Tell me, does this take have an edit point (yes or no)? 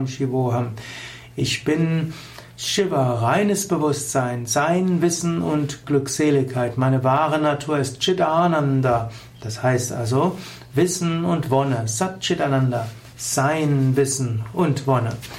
no